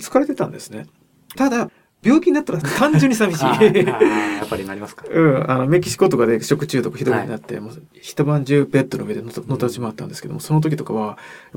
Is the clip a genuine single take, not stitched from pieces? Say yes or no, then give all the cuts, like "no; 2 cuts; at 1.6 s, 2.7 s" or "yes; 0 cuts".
no; 1 cut; at 1.3 s